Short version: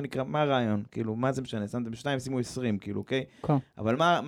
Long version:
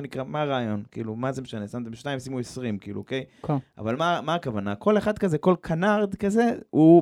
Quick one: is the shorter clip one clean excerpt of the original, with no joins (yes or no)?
yes